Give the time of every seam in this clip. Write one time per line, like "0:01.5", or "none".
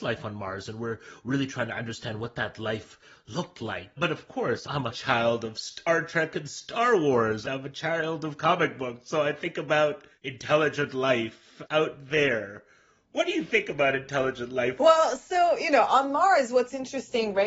0:07.4
0:14.8